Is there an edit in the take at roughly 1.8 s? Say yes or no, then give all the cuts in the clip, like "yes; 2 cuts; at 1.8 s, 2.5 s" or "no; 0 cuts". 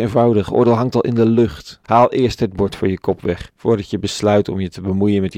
yes; 2 cuts; at 1.8 s, 3.6 s